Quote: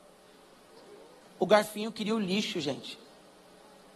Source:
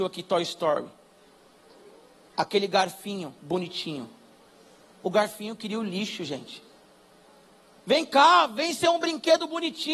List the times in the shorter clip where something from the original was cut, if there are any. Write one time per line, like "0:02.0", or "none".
0:01.2

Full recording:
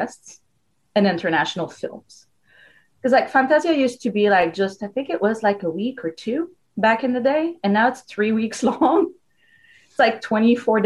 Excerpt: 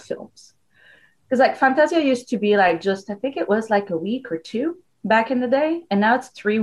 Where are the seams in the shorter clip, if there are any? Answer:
none

